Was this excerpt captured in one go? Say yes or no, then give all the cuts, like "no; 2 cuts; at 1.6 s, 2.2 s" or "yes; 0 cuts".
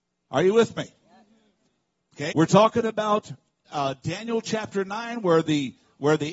no; 2 cuts; at 2.3 s, 3.7 s